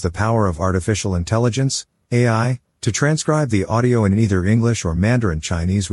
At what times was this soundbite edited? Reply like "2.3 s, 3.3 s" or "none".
none